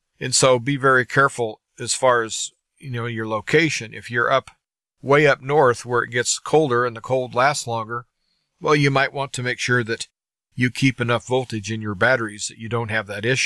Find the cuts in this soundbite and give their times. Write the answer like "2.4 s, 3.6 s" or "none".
none

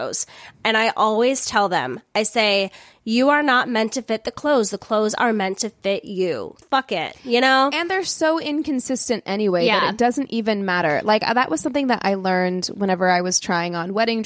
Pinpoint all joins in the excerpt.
6.6 s

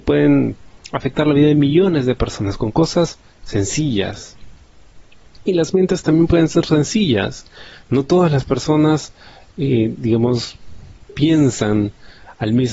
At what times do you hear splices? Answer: none

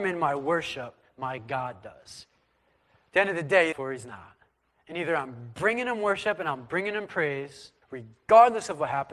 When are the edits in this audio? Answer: 3.7 s, 7.8 s

